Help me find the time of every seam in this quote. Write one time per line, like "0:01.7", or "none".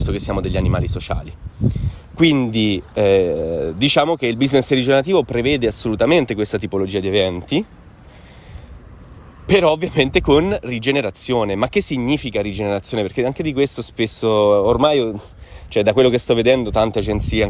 none